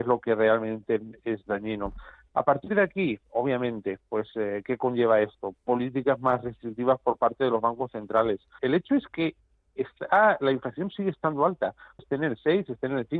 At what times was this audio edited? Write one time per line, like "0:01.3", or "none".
0:08.6
0:12.0